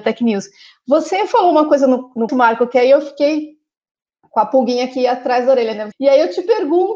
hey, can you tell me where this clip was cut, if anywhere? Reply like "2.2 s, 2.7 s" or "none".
2.3 s, 5.9 s